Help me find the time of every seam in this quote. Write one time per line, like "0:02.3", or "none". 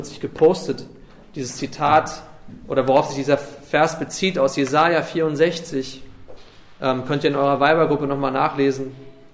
none